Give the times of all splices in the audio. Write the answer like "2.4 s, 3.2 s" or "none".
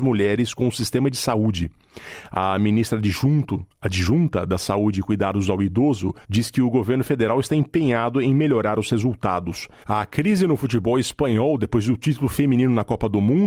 6.2 s, 9.8 s

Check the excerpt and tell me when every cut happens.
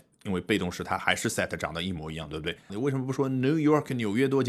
2.7 s

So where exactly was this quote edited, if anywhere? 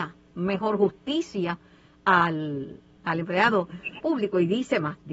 3.0 s, 4.0 s

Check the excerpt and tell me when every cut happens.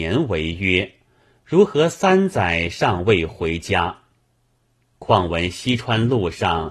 none

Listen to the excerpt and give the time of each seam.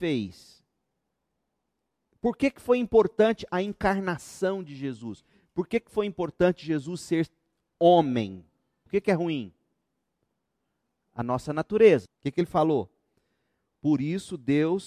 8.9 s, 12.0 s

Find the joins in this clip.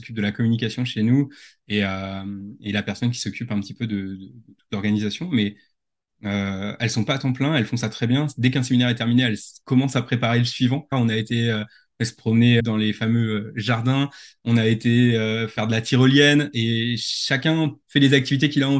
10.9 s, 12.6 s

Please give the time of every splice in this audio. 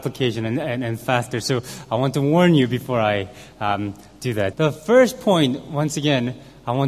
4.5 s

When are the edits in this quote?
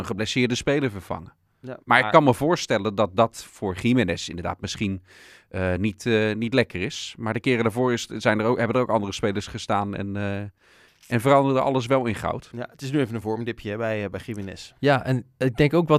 1.8 s

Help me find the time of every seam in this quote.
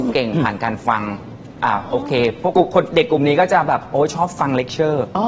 2.5 s

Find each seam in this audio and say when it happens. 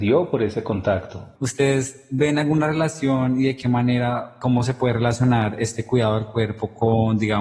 1.3 s

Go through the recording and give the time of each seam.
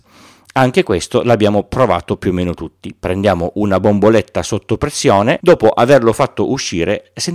5.4 s

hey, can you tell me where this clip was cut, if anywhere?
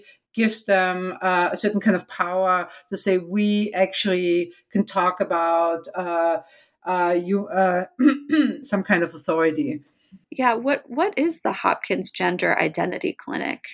8.6 s, 10.2 s

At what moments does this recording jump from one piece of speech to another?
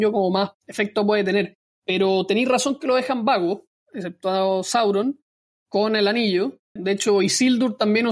3.7 s, 6.8 s

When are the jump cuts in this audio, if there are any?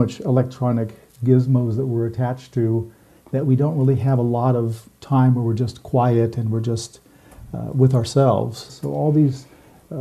8.7 s

